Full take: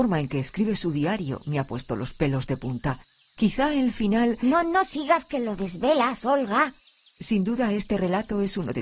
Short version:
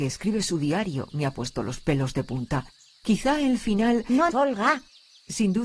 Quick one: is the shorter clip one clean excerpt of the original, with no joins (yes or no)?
no